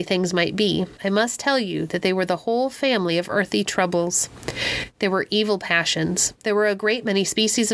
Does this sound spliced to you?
yes; 1 cut; at 1.0 s

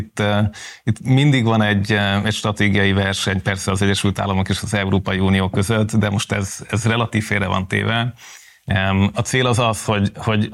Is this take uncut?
no; 1 cut; at 9.1 s

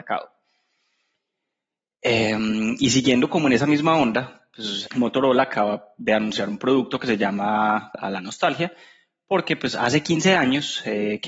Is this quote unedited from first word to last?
no; 2 cuts; at 4.9 s, 7.9 s

